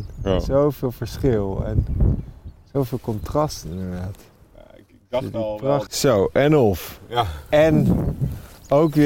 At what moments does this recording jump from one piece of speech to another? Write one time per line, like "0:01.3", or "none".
0:05.9